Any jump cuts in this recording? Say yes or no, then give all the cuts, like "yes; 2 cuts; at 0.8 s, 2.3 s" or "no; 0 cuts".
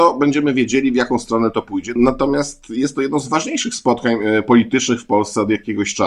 yes; 1 cut; at 2.0 s